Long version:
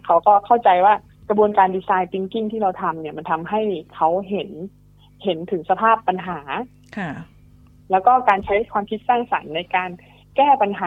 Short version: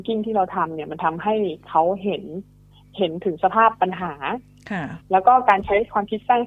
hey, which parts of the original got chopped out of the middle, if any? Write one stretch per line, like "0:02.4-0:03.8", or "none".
0:07.3-0:07.8

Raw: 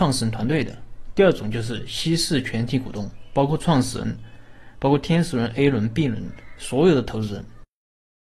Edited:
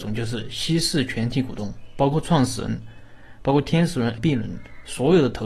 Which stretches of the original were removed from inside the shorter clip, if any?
0:05.5-0:05.9

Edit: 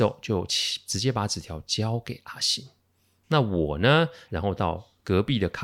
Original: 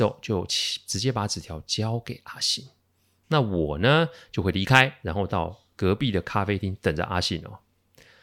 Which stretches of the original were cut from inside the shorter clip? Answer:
0:04.3-0:05.0

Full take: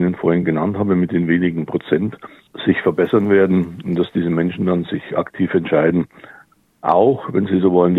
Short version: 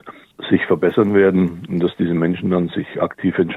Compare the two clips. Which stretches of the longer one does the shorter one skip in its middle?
none

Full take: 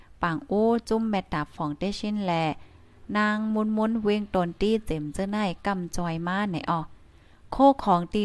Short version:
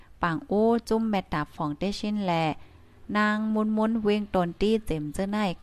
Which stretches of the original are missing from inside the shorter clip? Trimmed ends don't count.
none

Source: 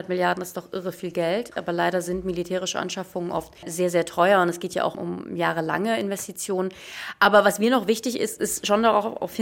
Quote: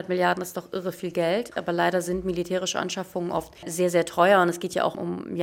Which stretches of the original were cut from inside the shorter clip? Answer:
none

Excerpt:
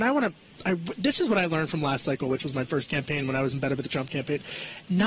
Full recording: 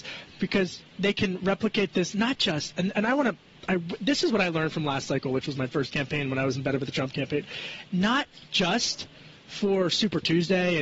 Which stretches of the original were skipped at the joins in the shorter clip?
none

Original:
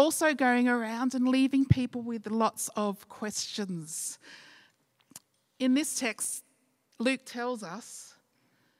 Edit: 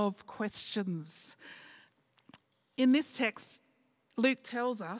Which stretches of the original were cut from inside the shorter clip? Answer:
none

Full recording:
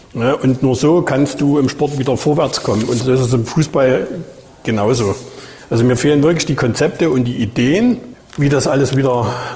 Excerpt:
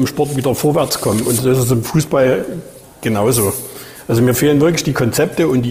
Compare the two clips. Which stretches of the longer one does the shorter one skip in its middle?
none

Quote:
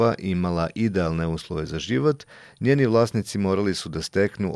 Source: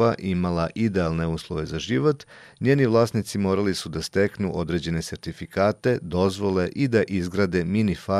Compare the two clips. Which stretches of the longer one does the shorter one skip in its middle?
none

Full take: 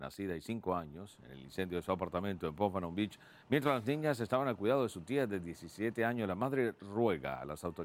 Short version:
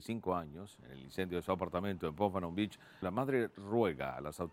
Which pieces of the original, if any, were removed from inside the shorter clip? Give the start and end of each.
0:03.4-0:06.3

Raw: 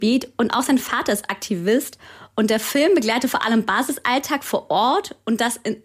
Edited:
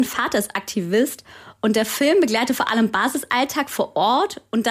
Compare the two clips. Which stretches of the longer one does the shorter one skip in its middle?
none

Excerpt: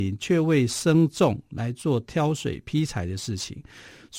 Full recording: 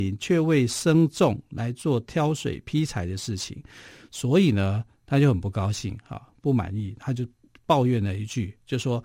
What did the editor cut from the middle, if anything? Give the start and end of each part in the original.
none

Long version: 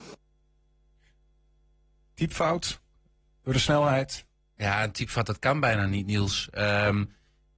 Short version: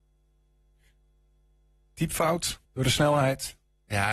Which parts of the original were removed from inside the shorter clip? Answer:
0:02.9-0:03.3

